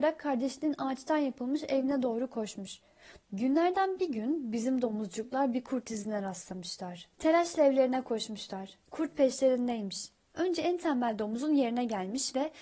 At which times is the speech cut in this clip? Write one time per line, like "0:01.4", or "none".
0:03.2
0:07.1